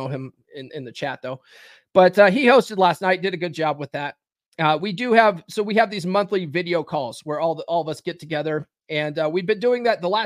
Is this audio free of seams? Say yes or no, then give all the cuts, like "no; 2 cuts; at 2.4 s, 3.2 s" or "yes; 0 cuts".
yes; 0 cuts